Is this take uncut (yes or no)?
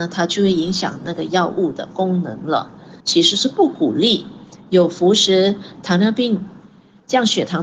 no